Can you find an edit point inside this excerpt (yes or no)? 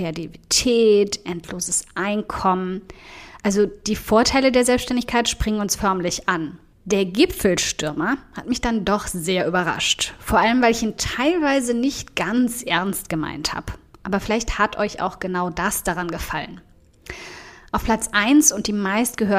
yes